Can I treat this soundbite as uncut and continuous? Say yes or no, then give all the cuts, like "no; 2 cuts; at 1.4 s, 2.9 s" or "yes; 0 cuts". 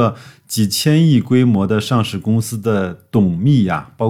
yes; 0 cuts